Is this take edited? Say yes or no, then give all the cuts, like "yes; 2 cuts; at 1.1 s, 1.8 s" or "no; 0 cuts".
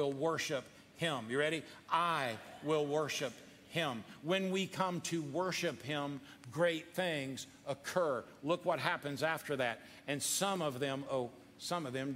yes; 1 cut; at 11.1 s